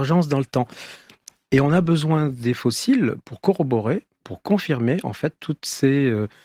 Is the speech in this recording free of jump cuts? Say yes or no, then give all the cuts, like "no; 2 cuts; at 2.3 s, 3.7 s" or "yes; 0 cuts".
yes; 0 cuts